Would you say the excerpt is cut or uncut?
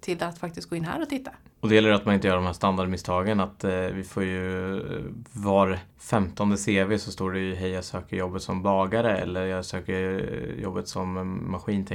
cut